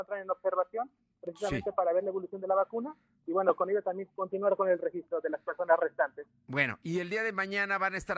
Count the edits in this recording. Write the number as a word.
zero